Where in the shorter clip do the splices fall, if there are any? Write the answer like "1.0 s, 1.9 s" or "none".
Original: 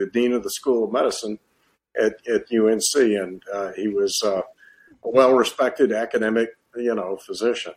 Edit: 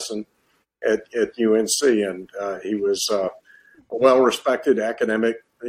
none